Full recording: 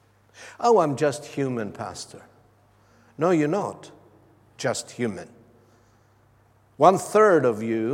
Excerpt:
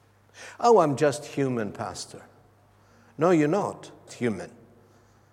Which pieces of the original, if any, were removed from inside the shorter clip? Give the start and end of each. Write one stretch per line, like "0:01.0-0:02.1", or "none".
0:04.1-0:04.9